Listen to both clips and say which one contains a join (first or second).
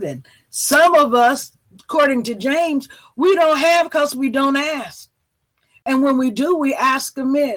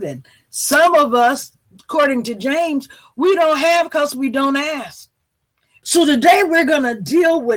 second